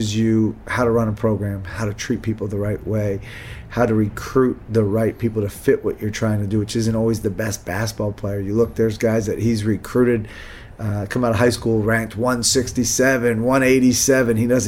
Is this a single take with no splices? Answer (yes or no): yes